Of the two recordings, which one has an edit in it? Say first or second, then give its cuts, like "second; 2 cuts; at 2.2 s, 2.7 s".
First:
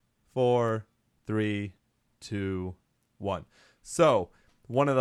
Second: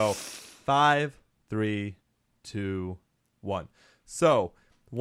second; 1 cut; at 1.3 s